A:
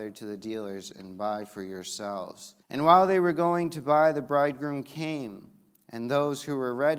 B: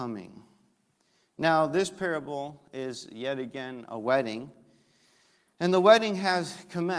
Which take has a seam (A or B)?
A